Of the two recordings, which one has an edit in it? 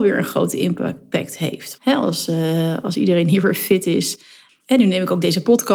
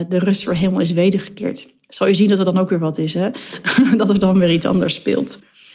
first; 2 cuts; at 1.8 s, 4.5 s

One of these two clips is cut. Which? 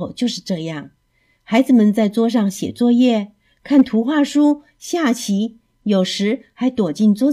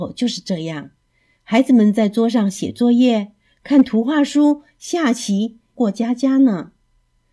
second; 1 cut; at 5.7 s

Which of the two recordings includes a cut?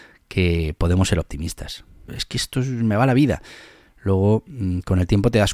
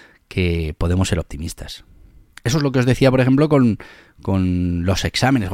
first; 1 cut; at 2.1 s

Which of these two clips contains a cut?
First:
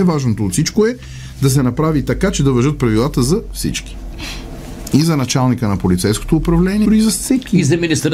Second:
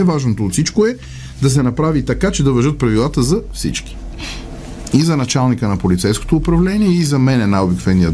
first; 1 cut; at 6.8 s

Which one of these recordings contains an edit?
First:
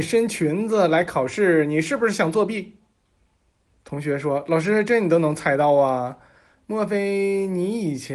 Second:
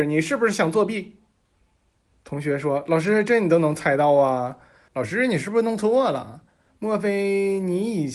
second; 2 cuts; at 4.9 s, 6.7 s

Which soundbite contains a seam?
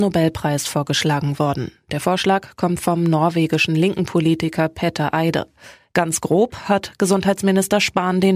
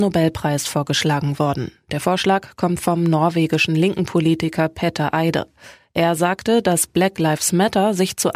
first; 1 cut; at 5.9 s

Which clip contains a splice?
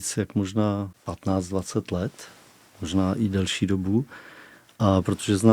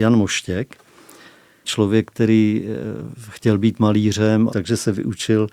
second; 2 cuts; at 1.6 s, 4.5 s

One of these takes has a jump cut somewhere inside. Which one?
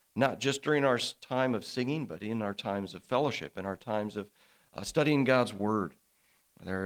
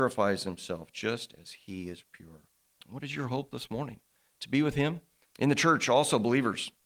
second; 1 cut; at 5.3 s

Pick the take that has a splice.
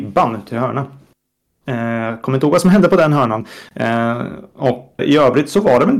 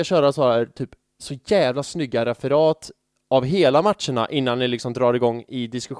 first; 1 cut; at 5.0 s

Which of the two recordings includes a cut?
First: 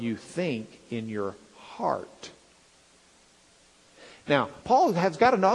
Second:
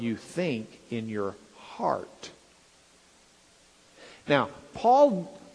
first; 1 cut; at 4.6 s

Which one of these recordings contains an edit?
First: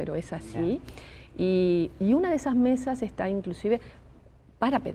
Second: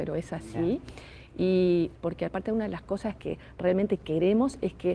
second; 1 cut; at 2.0 s

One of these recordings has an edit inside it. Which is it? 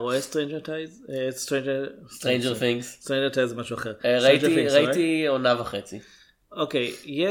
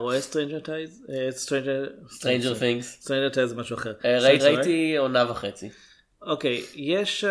second; 1 cut; at 4.4 s

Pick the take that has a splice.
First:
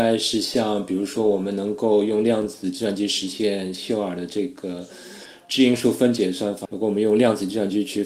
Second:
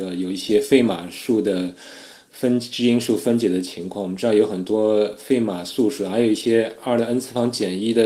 first; 1 cut; at 6.6 s

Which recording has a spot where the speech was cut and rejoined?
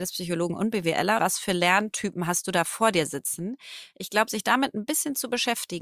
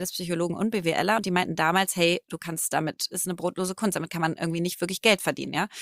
first; 1 cut; at 1.2 s

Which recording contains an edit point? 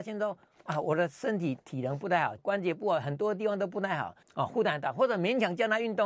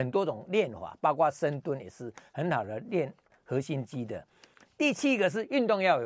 first; 2 cuts; at 2.4 s, 4.2 s

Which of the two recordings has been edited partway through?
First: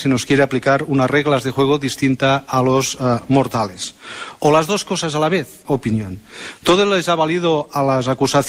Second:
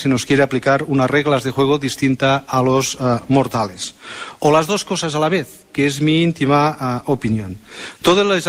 first; 1 cut; at 5.6 s

